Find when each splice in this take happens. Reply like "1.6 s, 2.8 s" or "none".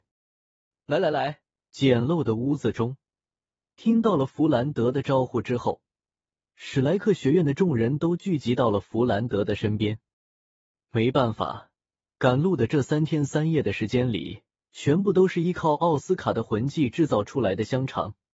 1.6 s, 14.6 s